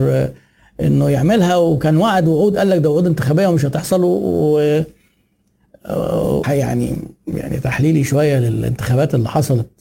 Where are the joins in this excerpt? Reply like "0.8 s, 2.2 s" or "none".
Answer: 6.4 s